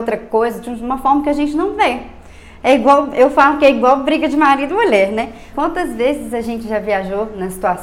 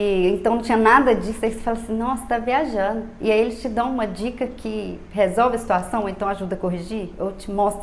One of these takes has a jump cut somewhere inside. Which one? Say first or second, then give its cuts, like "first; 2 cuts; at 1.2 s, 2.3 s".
first; 1 cut; at 5.5 s